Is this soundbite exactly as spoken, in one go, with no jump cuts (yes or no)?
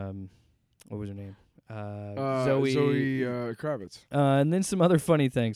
no